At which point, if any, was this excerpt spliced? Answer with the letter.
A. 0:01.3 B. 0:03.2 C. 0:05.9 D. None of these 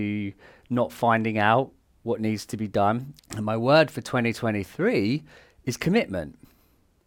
B